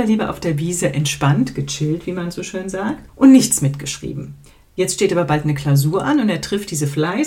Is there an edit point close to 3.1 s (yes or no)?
yes